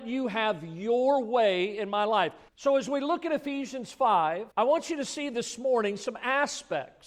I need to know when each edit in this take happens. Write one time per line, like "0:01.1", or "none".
0:02.5
0:04.5